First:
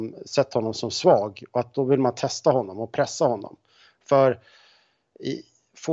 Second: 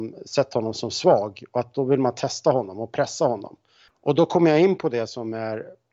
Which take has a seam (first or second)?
second